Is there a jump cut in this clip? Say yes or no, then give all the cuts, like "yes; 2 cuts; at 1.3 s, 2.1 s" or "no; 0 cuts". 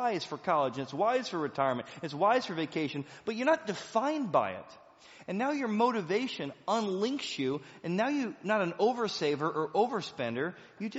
no; 0 cuts